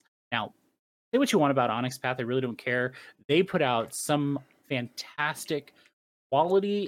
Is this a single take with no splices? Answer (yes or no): yes